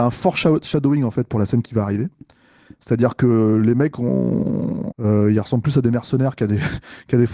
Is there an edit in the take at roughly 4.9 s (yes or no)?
yes